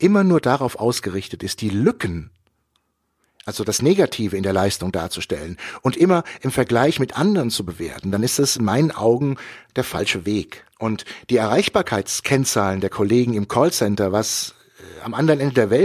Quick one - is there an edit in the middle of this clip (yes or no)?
yes